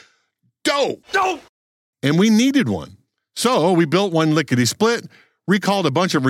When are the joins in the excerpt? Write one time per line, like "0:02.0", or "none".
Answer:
0:01.0